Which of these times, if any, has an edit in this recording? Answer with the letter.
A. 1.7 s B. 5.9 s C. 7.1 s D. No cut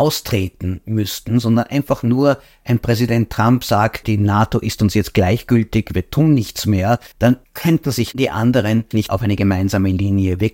C